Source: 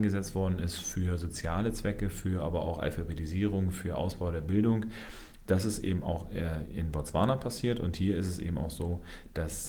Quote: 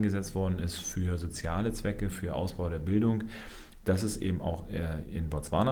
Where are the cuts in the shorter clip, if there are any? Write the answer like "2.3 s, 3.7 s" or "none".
2.1 s